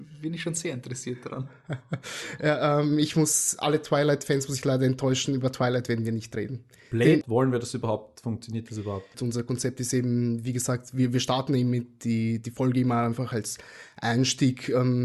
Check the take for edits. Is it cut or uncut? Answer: cut